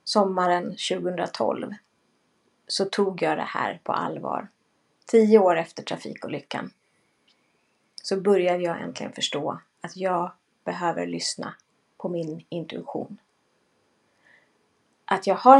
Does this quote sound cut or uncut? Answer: uncut